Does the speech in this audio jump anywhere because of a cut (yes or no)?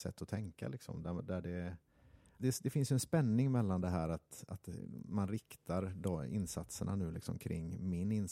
yes